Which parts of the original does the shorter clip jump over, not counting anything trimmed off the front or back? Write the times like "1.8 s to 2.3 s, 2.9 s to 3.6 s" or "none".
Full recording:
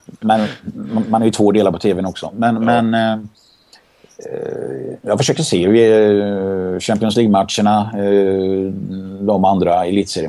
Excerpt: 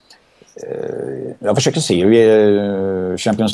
none